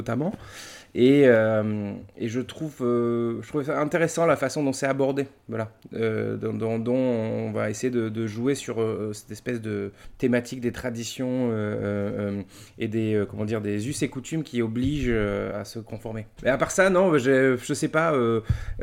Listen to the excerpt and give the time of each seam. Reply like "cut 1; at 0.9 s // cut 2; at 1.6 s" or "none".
cut 1; at 16.4 s